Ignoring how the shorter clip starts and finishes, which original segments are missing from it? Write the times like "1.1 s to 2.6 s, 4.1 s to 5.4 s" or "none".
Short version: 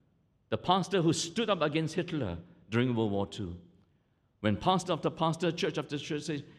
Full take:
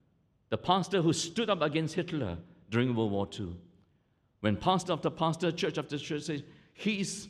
none